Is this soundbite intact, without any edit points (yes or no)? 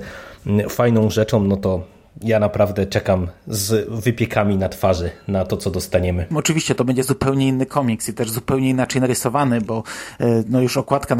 no